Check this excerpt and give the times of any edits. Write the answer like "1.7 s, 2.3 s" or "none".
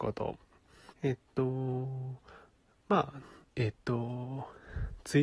0.9 s, 3.4 s